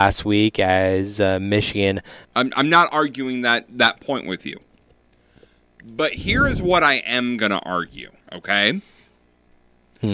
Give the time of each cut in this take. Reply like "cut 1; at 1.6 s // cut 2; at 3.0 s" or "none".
cut 1; at 2.2 s // cut 2; at 8.2 s